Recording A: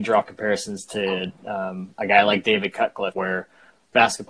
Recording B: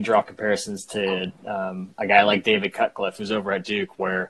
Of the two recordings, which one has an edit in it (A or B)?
A